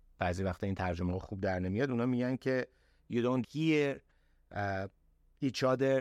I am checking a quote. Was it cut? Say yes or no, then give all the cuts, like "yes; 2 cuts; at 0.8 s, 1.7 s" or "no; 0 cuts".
yes; 1 cut; at 3.4 s